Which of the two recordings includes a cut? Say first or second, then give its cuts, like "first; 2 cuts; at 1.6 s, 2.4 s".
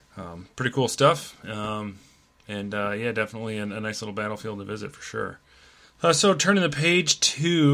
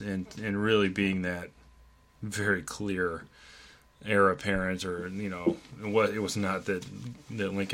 first; 1 cut; at 5.8 s